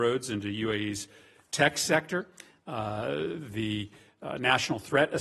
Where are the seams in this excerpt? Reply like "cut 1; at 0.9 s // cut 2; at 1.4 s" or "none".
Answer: none